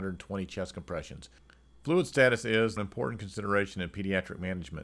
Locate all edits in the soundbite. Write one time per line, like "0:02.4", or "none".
0:02.8

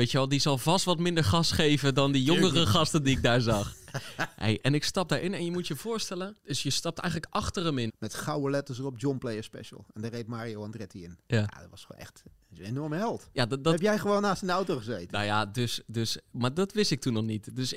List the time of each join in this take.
0:06.4
0:07.9

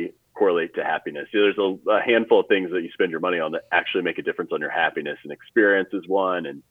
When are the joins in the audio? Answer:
none

